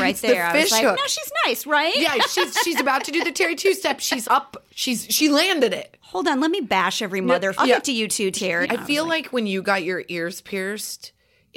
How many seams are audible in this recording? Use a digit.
3